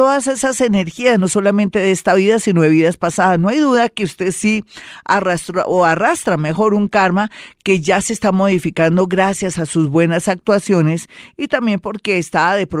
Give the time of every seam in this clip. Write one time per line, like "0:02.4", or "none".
none

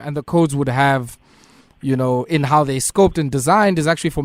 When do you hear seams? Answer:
none

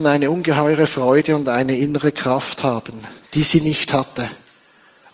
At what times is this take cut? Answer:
none

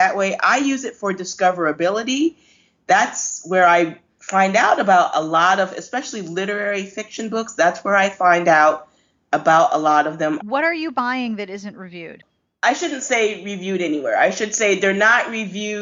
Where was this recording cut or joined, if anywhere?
0:10.4

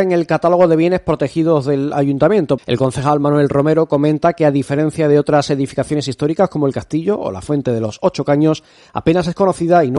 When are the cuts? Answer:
0:02.6

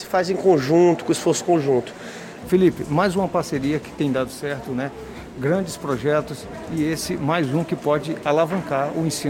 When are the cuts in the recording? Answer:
0:02.4

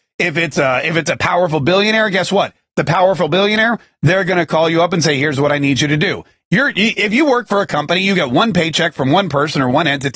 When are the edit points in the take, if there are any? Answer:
0:06.4

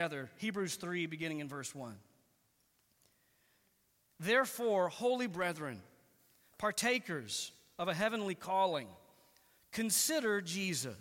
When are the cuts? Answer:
none

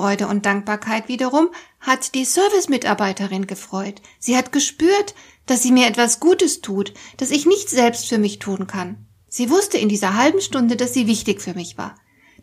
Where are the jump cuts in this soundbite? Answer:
none

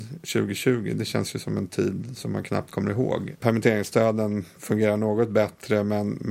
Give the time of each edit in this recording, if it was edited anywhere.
0:03.4

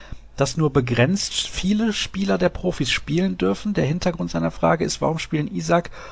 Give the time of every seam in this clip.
none

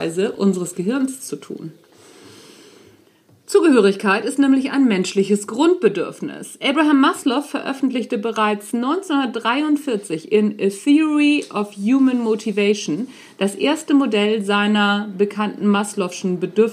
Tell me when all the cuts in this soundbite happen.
none

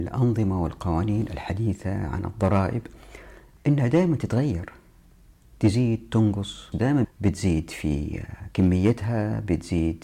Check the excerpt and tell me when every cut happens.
0:07.0

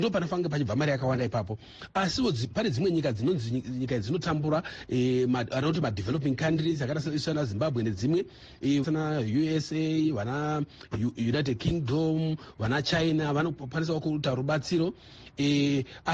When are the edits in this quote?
0:08.8

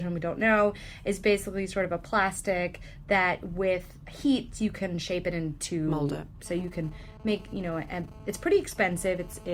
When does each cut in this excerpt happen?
0:06.4

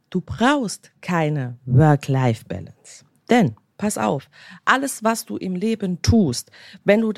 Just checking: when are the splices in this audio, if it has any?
none

